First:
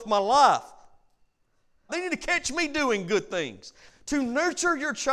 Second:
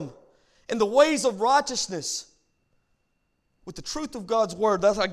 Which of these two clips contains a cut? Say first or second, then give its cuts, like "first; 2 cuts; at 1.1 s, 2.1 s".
first; 2 cuts; at 1.9 s, 3.9 s